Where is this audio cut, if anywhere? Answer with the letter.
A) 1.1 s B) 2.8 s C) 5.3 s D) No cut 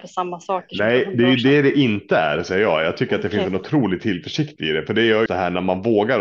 C